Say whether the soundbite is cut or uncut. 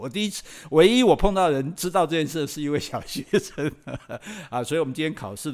uncut